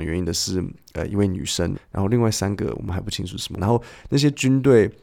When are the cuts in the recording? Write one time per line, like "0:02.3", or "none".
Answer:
0:01.7
0:03.6